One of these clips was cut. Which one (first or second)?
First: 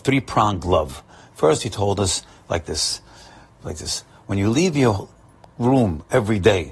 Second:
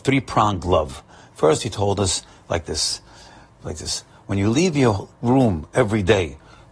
second